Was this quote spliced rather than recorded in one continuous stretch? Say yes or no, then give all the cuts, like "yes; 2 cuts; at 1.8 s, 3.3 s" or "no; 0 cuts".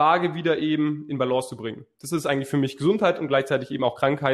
no; 0 cuts